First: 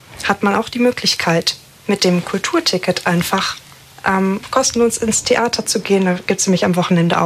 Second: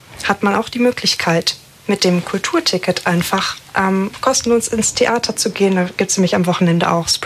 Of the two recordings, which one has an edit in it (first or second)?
second